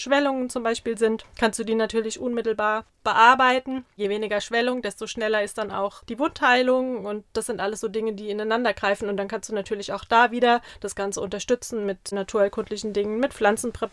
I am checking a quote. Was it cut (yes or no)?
no